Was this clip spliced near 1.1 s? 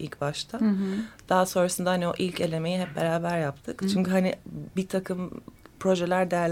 no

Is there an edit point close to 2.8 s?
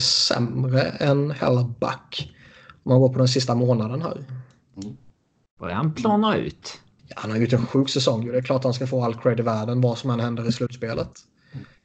no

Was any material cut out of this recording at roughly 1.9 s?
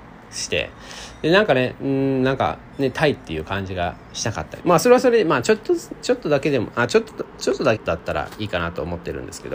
no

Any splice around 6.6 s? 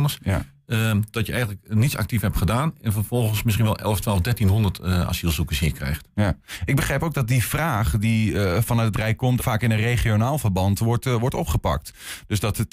no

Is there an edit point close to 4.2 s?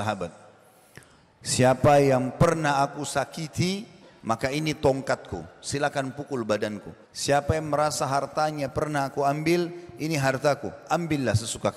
no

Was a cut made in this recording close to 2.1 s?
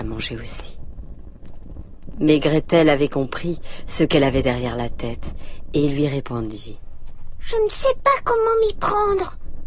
no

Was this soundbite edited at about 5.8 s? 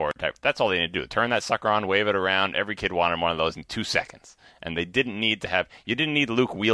no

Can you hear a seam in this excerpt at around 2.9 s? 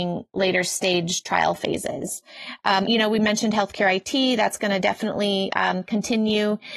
yes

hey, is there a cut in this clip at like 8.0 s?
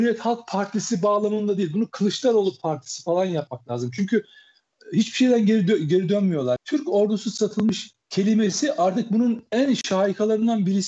yes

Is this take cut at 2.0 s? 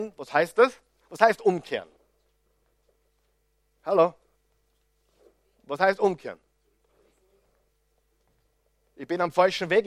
no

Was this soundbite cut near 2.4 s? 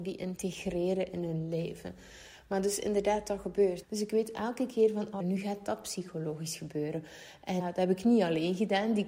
no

